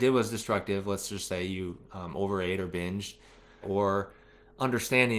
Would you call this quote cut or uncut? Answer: cut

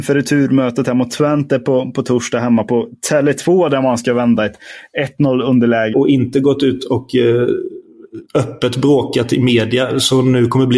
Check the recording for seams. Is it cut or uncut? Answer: cut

